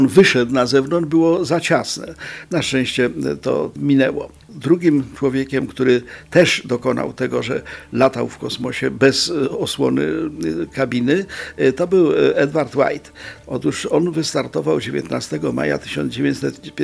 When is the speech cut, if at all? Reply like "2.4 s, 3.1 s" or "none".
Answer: 2.5 s, 13.4 s